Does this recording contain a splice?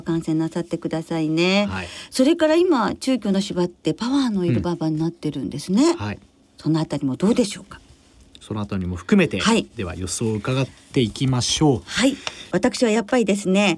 no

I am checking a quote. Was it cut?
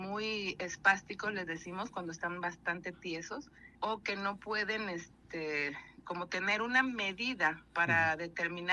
yes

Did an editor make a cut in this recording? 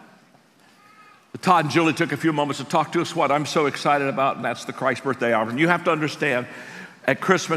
no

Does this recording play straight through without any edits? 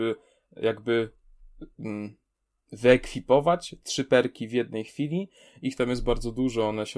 yes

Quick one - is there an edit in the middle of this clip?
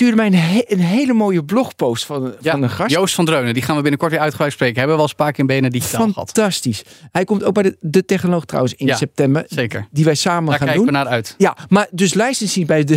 no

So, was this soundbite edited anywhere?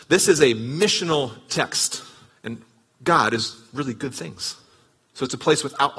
yes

